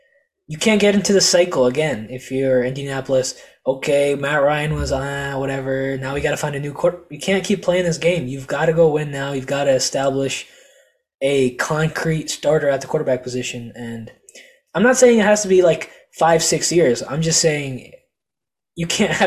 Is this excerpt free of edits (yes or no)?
yes